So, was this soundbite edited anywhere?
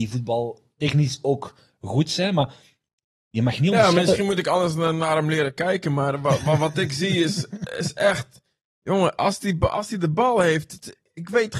no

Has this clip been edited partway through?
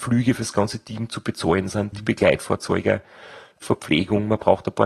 yes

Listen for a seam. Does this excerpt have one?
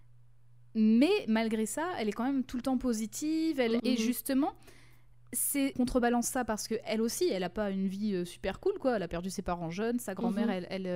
yes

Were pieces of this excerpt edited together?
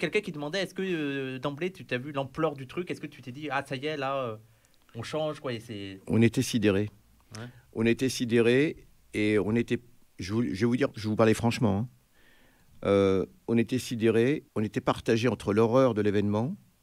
yes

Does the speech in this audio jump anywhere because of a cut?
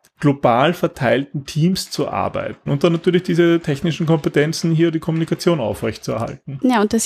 yes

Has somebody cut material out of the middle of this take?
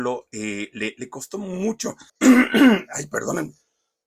yes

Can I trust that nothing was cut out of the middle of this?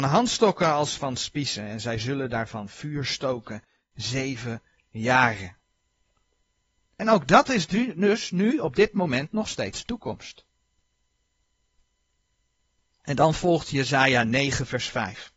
no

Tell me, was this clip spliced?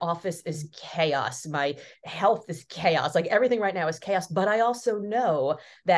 no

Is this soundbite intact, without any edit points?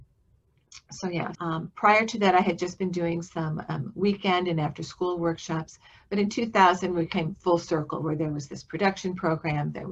no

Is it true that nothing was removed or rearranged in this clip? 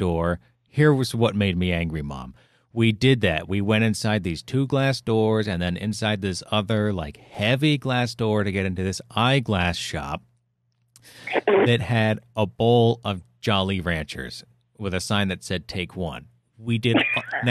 yes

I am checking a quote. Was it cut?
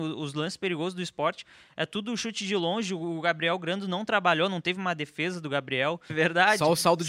yes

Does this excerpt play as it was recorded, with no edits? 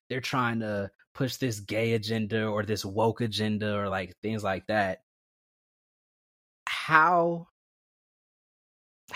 yes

